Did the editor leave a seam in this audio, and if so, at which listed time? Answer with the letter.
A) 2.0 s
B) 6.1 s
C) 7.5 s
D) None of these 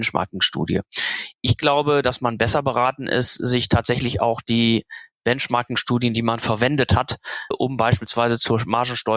C